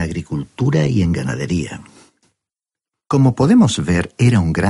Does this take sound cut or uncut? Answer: cut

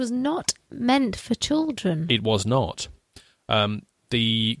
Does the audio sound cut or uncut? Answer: uncut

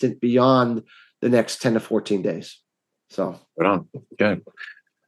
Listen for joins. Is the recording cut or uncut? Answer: uncut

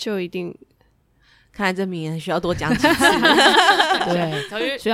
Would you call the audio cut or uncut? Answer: uncut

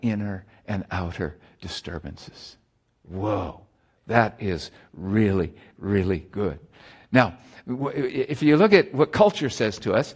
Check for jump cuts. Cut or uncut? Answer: uncut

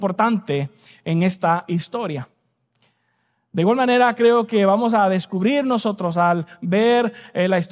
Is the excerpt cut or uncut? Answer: uncut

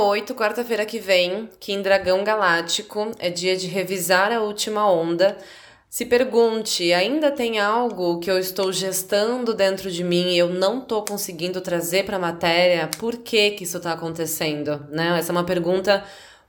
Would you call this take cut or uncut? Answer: uncut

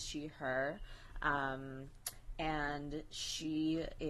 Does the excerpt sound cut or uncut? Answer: uncut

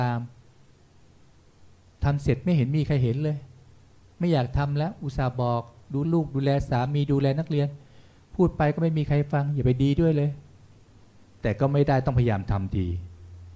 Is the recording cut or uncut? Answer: cut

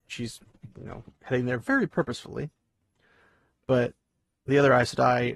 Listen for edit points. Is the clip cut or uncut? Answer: uncut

